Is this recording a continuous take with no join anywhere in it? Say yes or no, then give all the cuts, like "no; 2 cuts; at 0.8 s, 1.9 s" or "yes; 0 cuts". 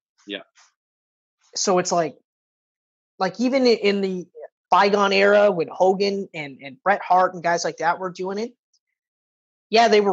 no; 1 cut; at 4.7 s